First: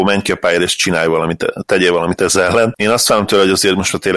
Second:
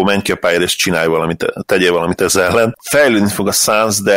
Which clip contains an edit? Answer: second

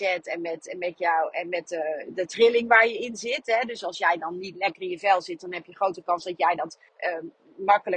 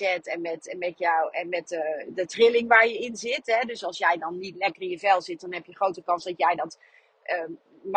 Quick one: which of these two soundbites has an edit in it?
first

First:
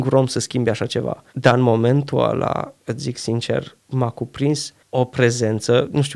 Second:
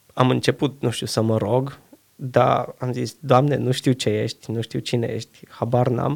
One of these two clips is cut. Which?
first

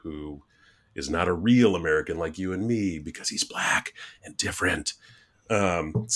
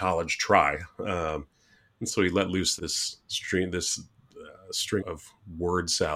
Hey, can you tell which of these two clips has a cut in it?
second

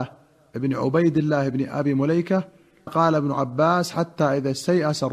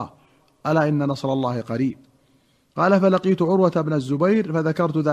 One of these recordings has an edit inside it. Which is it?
first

